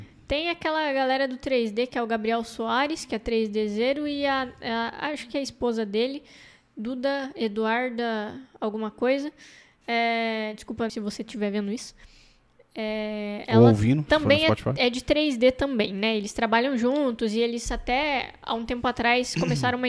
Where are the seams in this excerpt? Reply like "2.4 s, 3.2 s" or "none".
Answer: 10.9 s